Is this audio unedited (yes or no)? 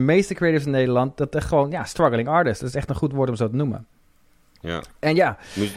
yes